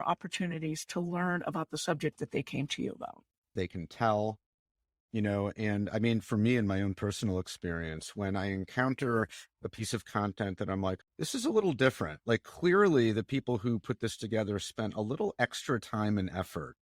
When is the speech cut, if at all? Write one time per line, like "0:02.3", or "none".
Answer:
0:03.6
0:11.0